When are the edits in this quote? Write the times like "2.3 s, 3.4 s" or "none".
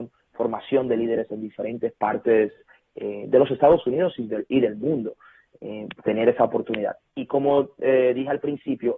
7.0 s